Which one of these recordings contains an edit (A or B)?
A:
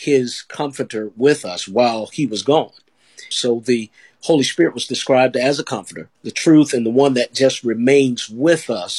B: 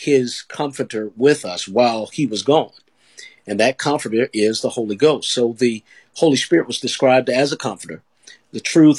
A